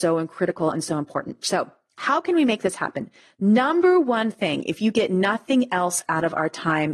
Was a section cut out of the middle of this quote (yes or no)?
no